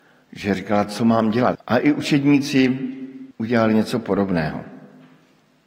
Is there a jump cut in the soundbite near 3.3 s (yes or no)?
yes